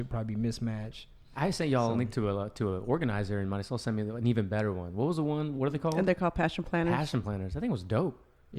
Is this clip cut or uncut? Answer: uncut